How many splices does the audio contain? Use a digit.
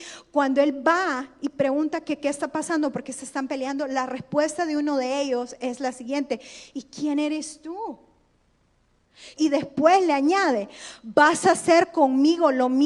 1